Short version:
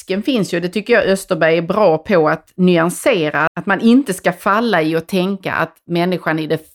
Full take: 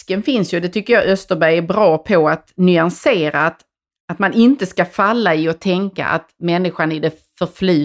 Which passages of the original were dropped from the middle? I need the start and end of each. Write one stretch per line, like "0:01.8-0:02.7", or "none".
0:03.5-0:04.0